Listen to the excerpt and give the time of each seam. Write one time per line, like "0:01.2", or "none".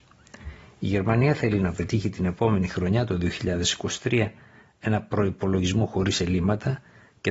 none